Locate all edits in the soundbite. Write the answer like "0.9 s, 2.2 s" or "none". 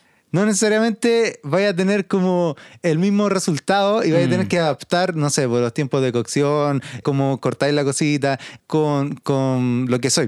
7.0 s, 8.6 s

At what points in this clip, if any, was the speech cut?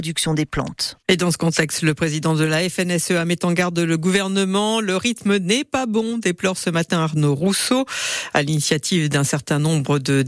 1.0 s

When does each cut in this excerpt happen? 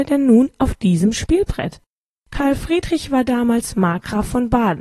2.2 s

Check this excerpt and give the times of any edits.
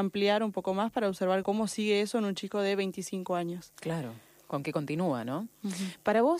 1.4 s

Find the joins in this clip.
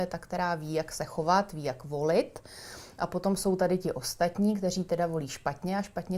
none

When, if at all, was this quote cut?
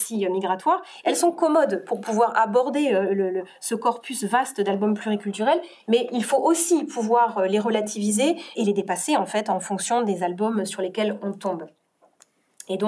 8.5 s

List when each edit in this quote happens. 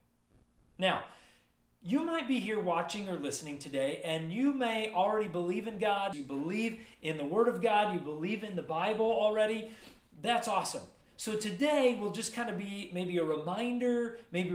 6.1 s

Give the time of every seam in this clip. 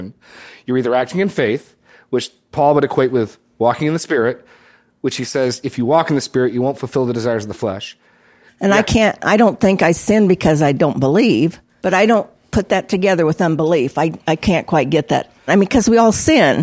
8.5 s, 11.8 s, 15.5 s

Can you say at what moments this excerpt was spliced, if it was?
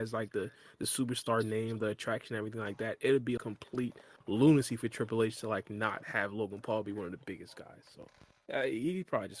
3.4 s

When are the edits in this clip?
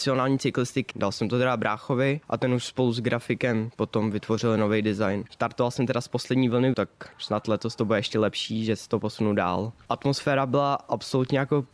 0.9 s, 5.3 s, 6.7 s

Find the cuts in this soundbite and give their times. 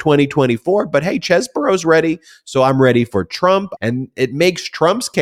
3.8 s

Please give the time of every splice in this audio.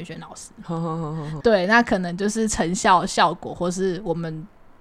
1.4 s

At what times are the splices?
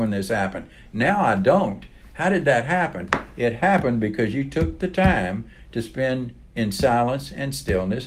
none

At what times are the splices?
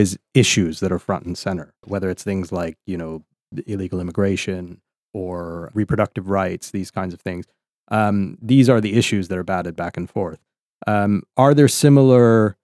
1.8 s

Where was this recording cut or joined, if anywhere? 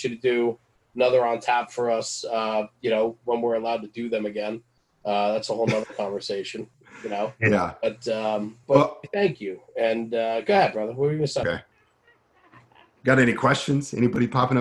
8.6 s, 11.4 s

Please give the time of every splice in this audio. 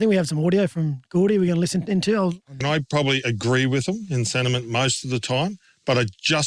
2.6 s

